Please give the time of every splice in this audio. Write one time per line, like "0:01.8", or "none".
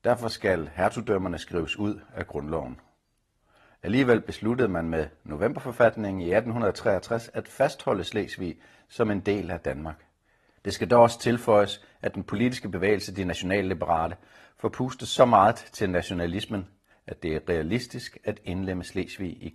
0:10.6
0:16.9